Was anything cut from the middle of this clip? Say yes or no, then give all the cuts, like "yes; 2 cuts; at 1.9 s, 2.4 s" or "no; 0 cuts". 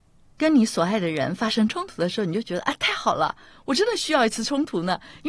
no; 0 cuts